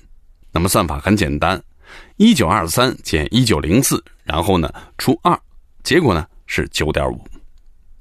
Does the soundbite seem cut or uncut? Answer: uncut